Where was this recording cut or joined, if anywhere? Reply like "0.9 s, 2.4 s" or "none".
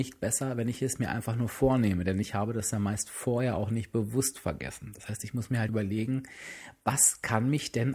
5.7 s